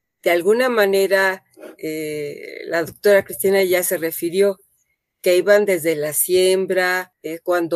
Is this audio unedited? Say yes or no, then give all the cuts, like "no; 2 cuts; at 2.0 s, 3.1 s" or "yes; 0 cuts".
yes; 0 cuts